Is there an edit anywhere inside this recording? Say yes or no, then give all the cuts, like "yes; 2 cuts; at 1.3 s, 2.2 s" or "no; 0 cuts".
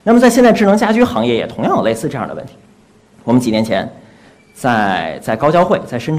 no; 0 cuts